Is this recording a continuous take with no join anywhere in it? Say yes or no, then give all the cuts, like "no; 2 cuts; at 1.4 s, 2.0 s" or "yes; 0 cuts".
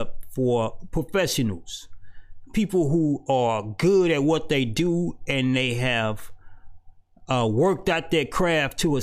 yes; 0 cuts